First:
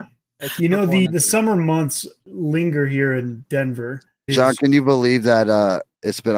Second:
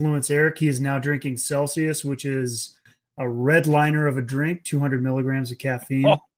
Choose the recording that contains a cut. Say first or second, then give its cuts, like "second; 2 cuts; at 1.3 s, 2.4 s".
first; 2 cuts; at 1.1 s, 4.3 s